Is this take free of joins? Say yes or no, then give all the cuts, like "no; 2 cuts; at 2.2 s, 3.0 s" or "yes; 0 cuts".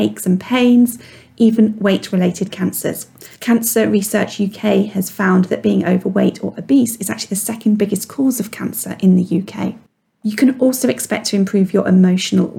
no; 1 cut; at 3.3 s